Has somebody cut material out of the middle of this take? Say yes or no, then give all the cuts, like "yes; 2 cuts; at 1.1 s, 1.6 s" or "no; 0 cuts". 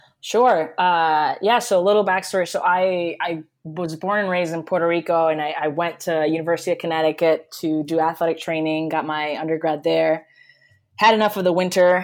no; 0 cuts